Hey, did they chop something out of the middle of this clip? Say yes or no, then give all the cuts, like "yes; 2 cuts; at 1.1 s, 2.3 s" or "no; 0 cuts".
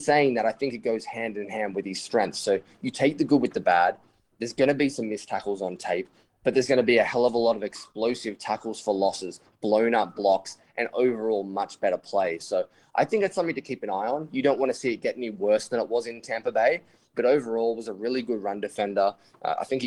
no; 0 cuts